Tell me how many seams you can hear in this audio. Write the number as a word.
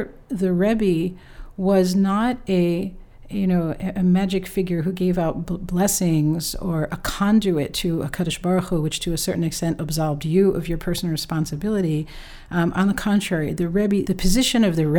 one